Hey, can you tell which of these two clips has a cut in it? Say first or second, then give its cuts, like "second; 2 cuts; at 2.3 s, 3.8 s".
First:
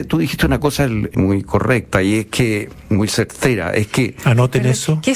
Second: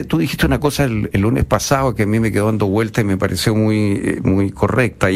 first; 1 cut; at 1.1 s